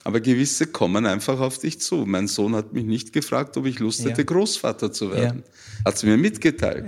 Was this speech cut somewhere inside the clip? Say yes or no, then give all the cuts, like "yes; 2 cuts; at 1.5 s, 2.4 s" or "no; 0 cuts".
no; 0 cuts